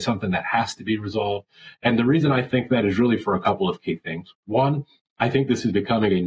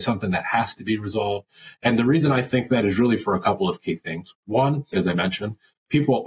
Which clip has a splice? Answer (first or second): second